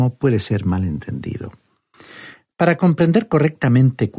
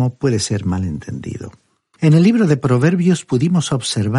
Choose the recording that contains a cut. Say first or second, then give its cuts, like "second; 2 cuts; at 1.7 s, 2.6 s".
second; 1 cut; at 2.0 s